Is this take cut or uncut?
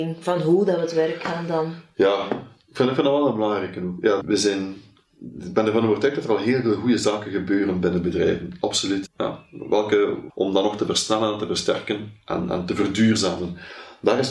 cut